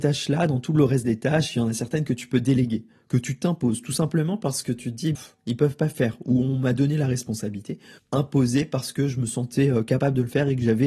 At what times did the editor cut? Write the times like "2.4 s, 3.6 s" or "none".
5.1 s, 8.0 s